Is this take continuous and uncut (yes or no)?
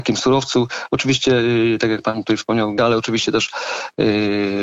no